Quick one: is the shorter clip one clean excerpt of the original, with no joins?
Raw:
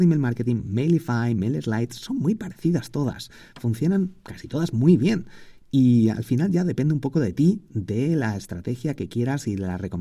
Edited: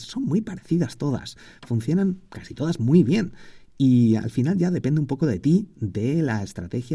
yes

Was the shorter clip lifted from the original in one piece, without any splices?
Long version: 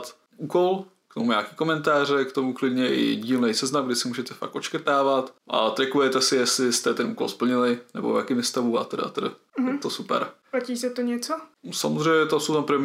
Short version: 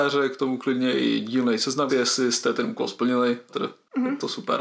no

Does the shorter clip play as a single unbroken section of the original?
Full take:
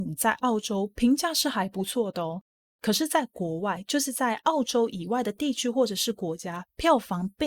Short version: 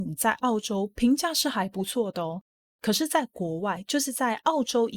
yes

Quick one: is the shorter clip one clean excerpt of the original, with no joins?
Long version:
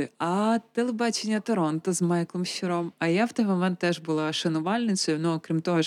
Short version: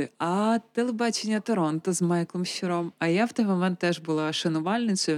yes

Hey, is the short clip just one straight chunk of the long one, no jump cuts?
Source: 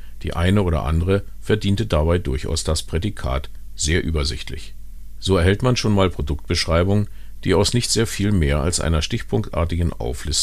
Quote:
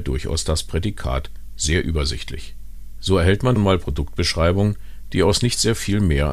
no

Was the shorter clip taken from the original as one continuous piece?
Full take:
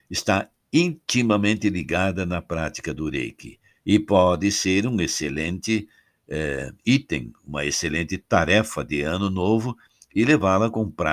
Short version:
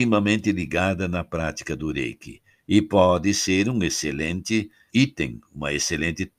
no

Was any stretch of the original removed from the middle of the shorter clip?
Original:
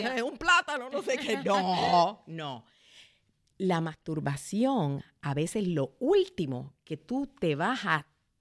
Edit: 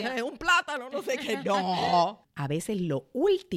yes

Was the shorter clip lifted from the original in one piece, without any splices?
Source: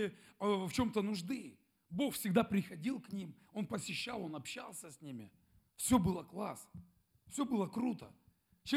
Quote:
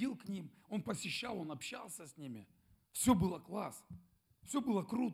yes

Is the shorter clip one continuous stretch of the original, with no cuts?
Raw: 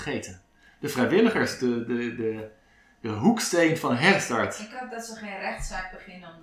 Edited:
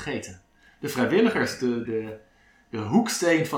no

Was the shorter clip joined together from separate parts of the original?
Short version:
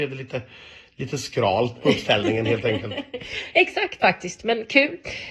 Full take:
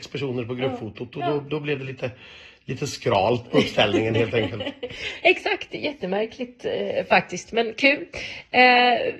yes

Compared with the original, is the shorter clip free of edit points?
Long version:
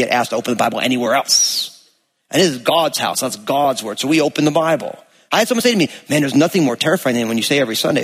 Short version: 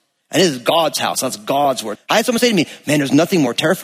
no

